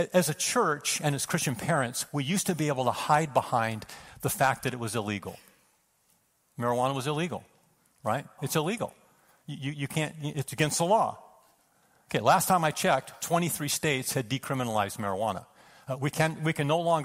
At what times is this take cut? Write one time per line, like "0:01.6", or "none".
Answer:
0:08.4